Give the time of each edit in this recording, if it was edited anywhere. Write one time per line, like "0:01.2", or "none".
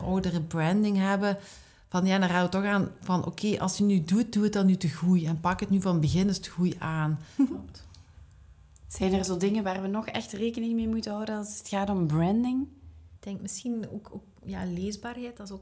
0:07.4

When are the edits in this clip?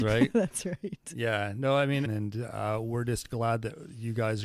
0:02.1

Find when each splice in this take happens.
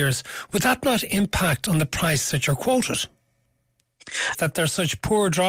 0:04.3

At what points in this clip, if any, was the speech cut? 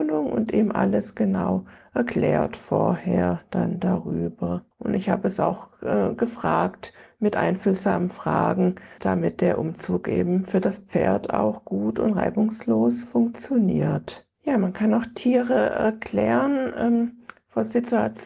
0:04.7
0:09.0

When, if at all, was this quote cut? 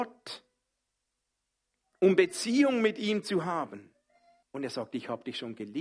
0:04.4

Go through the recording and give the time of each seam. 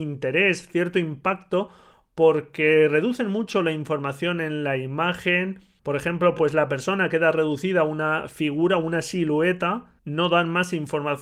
none

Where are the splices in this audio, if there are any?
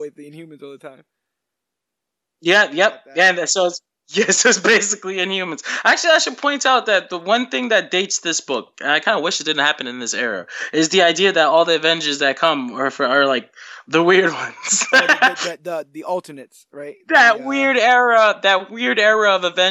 none

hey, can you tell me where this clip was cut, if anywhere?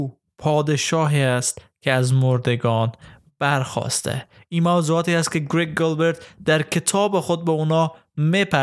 none

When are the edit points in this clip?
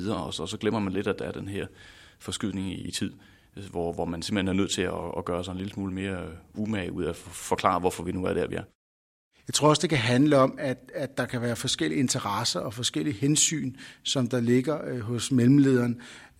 none

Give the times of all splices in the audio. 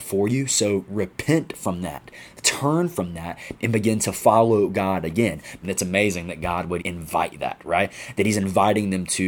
0:05.6
0:06.8

